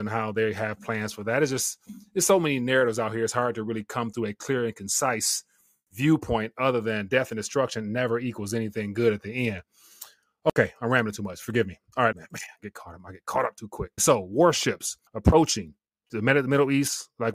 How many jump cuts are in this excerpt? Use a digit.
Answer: 3